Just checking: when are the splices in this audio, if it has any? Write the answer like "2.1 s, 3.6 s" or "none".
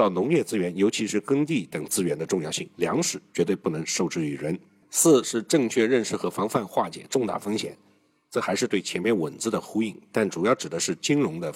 none

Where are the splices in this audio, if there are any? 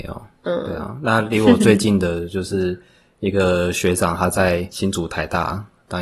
none

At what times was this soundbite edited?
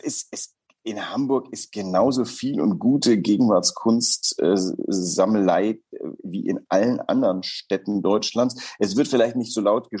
none

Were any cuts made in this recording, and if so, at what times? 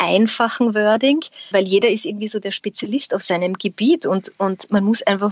1.5 s

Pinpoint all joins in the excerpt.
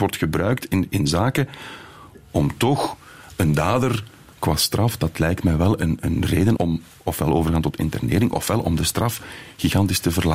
6.6 s

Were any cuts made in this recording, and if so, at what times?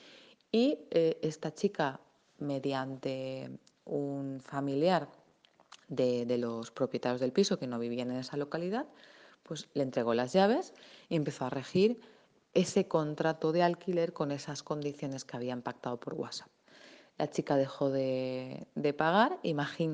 none

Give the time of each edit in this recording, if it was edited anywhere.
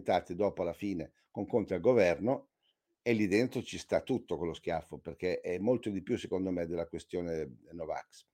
none

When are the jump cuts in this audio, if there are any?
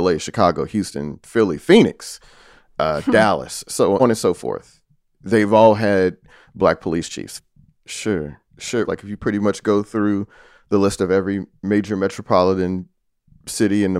4.0 s, 7.8 s, 8.8 s

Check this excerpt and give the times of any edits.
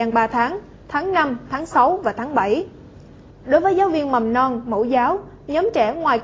3.3 s

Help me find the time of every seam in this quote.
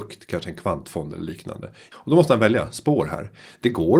1.9 s

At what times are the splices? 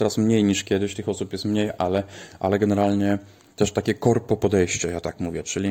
none

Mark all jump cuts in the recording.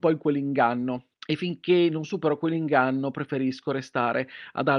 1.1 s

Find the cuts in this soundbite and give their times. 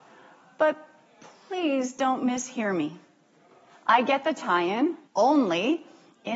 5.1 s

